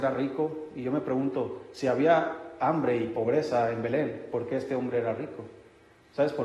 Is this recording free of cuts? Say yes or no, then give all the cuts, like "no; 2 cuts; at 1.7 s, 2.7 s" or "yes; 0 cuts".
yes; 0 cuts